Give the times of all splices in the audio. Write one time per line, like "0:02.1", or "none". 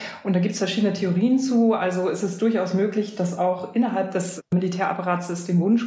none